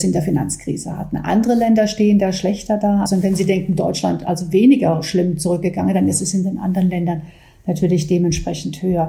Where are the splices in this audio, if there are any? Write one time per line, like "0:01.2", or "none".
0:03.1